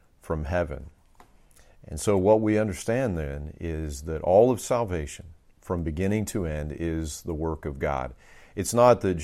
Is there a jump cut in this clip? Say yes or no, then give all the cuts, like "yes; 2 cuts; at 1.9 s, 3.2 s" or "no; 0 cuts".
no; 0 cuts